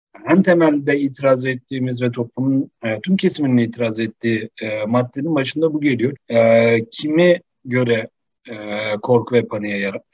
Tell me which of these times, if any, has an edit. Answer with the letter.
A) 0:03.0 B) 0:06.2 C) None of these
B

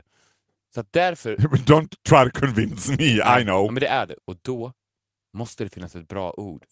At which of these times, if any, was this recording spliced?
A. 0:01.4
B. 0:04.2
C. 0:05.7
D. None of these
B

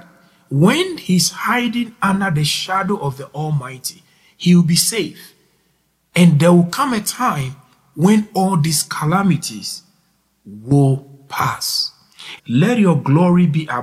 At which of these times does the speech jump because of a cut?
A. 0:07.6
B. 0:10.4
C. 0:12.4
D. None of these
C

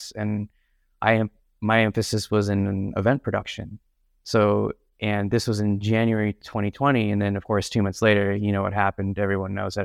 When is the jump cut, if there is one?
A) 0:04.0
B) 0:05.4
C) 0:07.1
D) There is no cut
D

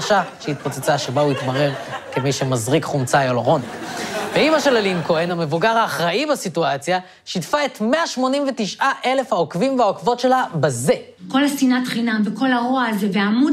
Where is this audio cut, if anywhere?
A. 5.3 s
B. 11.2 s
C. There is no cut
A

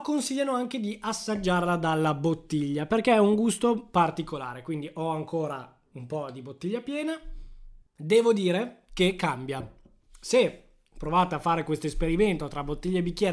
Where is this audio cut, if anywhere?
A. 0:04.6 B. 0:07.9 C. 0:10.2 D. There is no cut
B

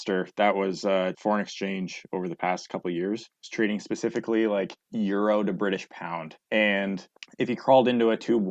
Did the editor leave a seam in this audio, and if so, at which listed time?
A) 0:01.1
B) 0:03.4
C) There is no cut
A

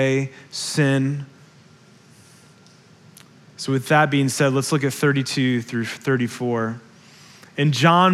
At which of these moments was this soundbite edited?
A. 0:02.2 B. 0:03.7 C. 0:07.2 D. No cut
D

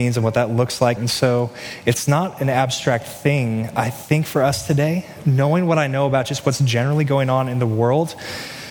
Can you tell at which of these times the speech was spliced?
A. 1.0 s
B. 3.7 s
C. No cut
A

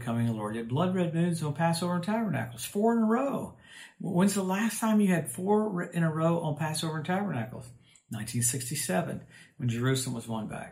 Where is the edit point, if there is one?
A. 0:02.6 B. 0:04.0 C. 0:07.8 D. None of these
D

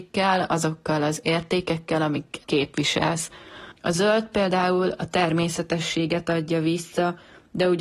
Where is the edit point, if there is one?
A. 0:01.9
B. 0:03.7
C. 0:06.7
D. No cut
B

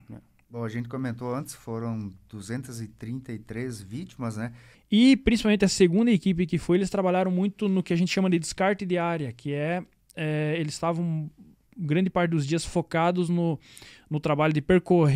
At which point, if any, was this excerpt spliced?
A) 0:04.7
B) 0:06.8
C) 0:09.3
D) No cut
A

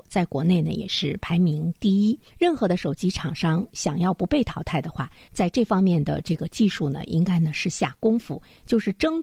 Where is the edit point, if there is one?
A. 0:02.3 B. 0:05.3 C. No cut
A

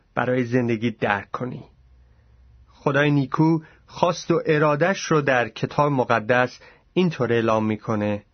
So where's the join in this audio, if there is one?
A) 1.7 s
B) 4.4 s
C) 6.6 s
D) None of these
D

